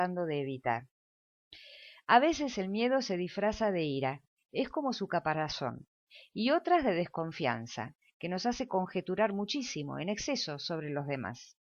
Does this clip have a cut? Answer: no; 0 cuts

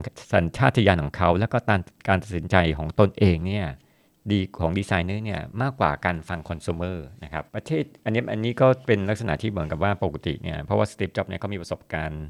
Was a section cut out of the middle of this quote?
yes; 1 cut; at 7.5 s

